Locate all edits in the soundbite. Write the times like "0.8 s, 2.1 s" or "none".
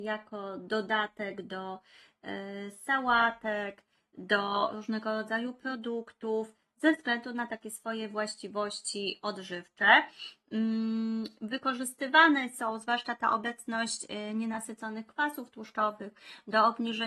none